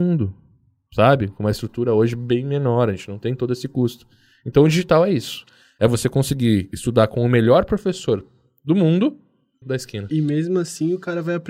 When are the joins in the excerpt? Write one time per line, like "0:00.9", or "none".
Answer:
0:09.6